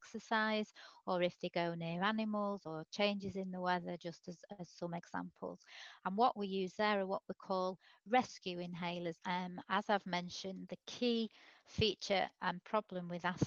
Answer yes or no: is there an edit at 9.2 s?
yes